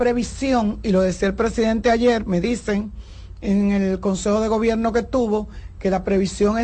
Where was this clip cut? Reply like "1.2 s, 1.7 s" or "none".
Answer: none